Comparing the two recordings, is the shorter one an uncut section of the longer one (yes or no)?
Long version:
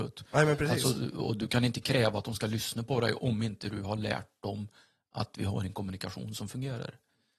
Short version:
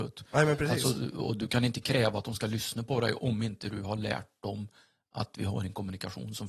yes